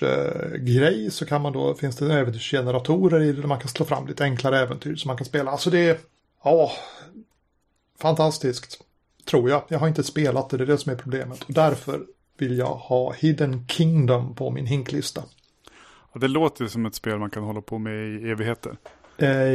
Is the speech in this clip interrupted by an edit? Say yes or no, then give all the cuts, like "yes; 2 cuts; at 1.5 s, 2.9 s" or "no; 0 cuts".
no; 0 cuts